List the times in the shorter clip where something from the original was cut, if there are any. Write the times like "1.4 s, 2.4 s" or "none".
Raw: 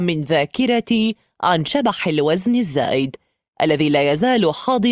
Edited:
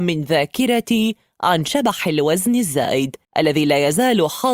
3.2 s

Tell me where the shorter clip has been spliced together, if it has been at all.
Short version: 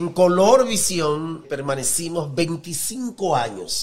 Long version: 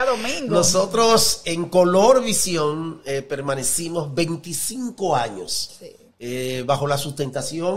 1.4 s

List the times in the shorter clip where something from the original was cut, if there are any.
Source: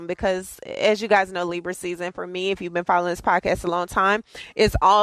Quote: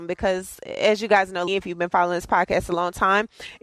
1.5 s

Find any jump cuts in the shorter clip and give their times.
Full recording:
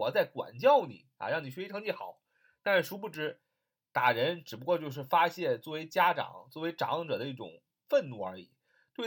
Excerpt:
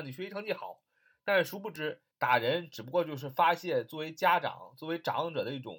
2.1 s

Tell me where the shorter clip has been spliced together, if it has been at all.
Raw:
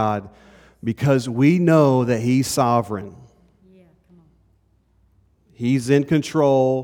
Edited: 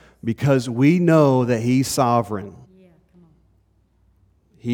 2.6 s

